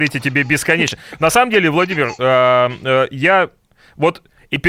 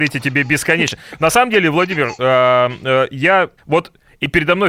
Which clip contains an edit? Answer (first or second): second